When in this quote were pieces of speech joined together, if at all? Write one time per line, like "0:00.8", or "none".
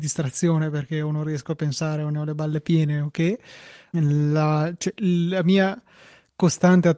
0:03.9